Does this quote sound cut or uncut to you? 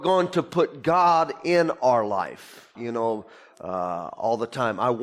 cut